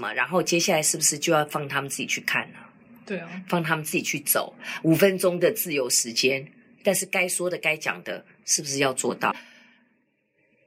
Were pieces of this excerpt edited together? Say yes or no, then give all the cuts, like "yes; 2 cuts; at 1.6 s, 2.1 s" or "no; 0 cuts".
yes; 1 cut; at 9.3 s